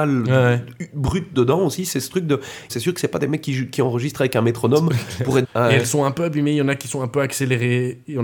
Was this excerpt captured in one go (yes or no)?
no